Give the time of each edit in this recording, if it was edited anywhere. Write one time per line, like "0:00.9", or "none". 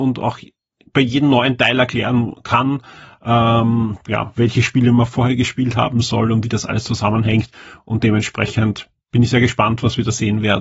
none